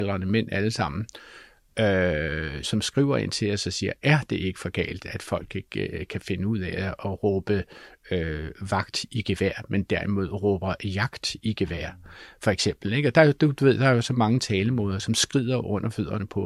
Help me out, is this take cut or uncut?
cut